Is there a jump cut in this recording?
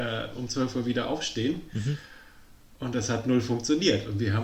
no; 0 cuts

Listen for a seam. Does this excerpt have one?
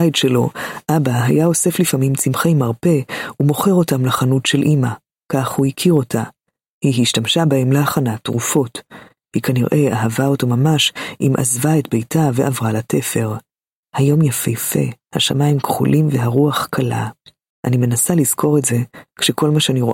yes; 2 cuts; at 13.8 s, 17.5 s

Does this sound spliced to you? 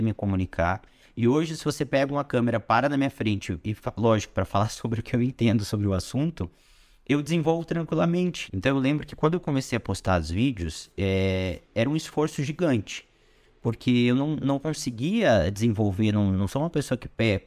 yes; 1 cut; at 8.5 s

